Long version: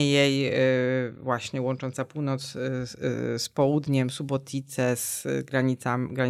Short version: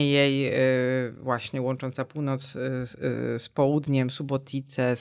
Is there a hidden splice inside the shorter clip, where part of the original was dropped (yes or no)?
no